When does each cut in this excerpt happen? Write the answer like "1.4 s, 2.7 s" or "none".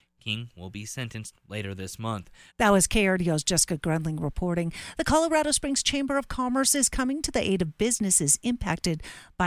2.5 s